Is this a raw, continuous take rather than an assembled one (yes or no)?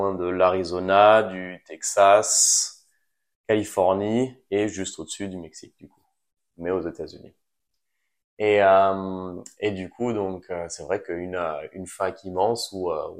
yes